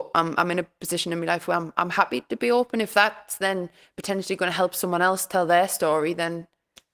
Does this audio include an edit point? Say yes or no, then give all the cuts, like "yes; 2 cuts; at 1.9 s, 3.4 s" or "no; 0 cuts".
no; 0 cuts